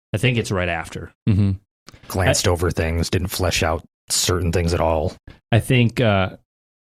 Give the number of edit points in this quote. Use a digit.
1